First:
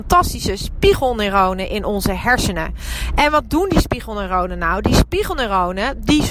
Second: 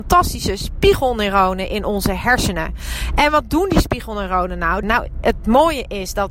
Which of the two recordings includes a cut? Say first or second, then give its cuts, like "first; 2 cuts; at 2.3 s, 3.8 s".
second; 1 cut; at 4.8 s